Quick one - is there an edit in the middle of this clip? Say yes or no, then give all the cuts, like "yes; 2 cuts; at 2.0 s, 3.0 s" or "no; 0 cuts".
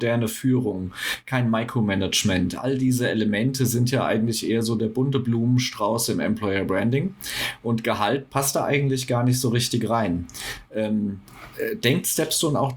no; 0 cuts